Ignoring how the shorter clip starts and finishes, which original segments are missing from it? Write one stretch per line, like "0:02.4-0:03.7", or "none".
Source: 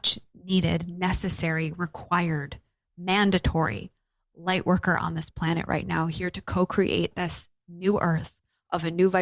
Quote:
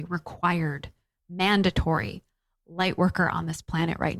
none